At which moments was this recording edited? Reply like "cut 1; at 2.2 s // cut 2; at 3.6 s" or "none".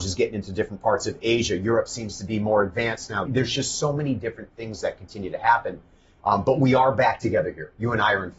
cut 1; at 3.3 s